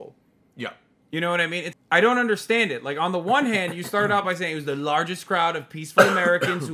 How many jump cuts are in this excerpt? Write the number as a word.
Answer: one